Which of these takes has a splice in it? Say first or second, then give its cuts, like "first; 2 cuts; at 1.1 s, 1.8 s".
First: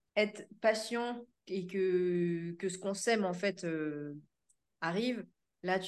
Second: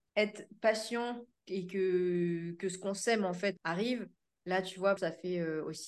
second; 2 cuts; at 3.6 s, 5.0 s